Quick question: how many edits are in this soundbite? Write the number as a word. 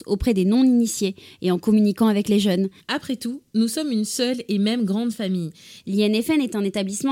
two